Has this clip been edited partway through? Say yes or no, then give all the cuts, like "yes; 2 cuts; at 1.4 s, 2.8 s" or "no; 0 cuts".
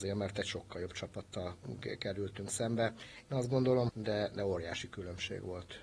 yes; 1 cut; at 3.9 s